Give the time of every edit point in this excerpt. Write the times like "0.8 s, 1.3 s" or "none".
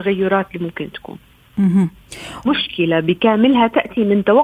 2.5 s